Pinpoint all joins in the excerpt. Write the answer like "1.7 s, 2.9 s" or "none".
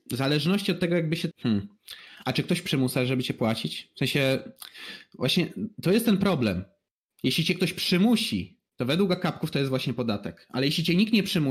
1.3 s